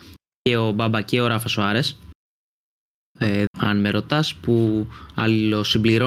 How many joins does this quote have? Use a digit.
1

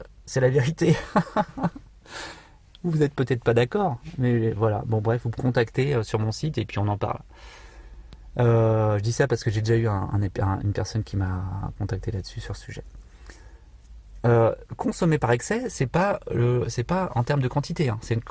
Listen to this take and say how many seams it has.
0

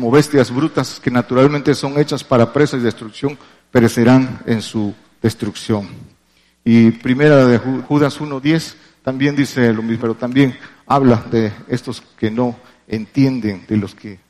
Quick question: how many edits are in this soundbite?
2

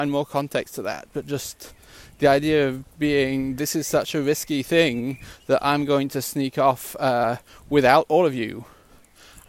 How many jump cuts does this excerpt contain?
0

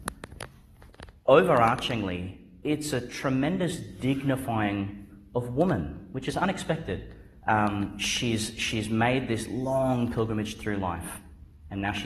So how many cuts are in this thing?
1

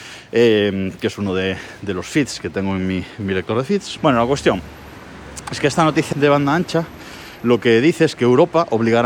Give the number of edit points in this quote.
2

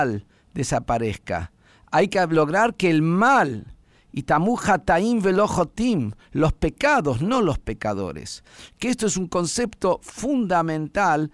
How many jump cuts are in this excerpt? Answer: 0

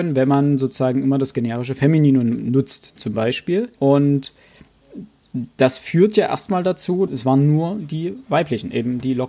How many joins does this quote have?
2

